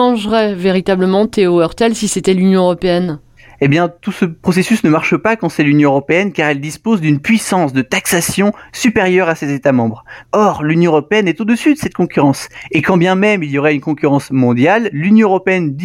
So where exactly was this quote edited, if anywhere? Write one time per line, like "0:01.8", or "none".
0:10.2